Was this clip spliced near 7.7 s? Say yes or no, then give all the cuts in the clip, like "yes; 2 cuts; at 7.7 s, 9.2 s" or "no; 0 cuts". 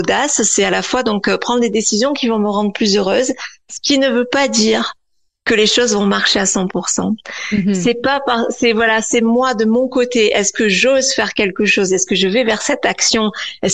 no; 1 cut; at 11.9 s